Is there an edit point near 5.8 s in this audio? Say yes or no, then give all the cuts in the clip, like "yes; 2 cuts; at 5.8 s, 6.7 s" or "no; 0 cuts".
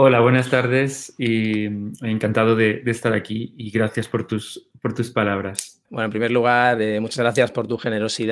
yes; 1 cut; at 5.8 s